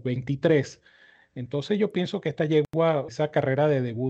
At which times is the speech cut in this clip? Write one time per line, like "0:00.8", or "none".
0:03.1